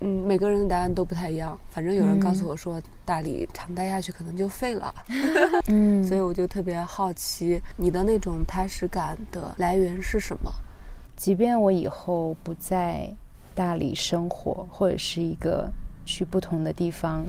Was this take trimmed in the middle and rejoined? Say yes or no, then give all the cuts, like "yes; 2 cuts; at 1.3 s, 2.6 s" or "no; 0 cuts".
yes; 2 cuts; at 5.6 s, 11.1 s